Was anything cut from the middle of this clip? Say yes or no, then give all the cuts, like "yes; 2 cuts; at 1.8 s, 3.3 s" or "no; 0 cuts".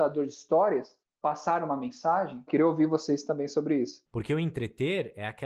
yes; 2 cuts; at 2.5 s, 4.1 s